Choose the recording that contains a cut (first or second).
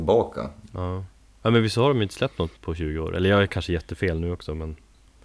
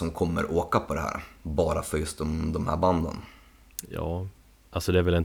first